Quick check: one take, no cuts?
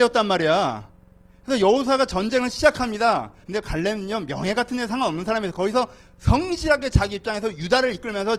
no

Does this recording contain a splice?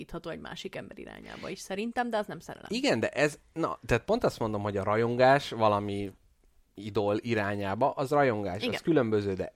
no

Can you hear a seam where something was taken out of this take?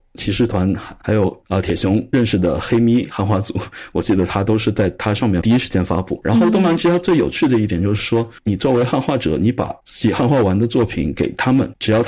no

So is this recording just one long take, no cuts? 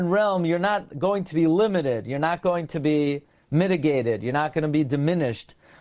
yes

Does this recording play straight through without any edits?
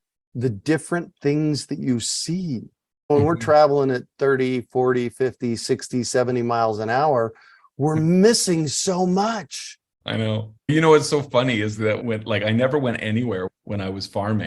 yes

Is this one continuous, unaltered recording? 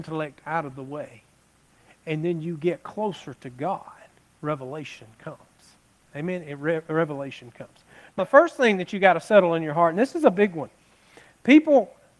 no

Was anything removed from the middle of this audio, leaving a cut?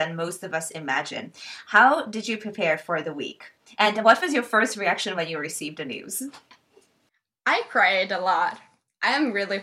no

